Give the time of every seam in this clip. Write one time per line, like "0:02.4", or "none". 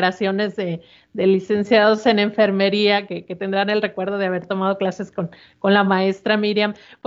none